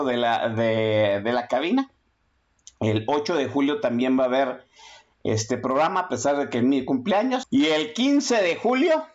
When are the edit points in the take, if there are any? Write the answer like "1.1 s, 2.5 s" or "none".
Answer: 7.4 s